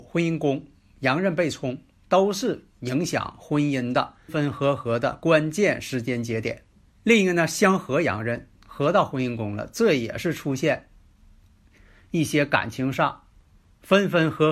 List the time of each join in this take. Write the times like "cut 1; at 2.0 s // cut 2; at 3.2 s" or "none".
cut 1; at 4.3 s // cut 2; at 8.5 s